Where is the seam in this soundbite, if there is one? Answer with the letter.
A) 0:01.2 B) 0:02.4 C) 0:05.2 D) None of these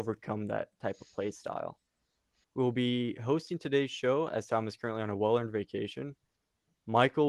B